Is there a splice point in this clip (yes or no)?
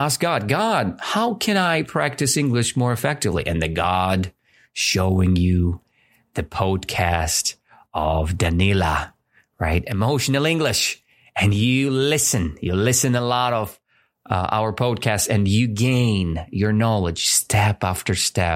no